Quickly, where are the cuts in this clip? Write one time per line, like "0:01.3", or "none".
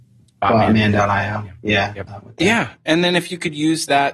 0:02.1

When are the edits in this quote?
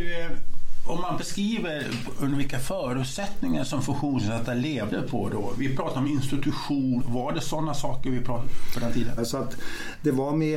0:07.0
0:09.2

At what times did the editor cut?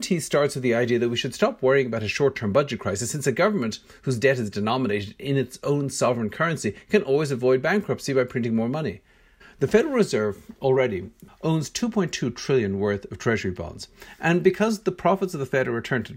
0:09.4
0:11.3

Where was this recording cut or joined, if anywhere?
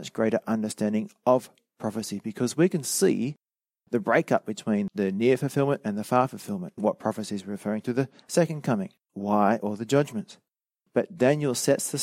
0:06.8
0:09.1

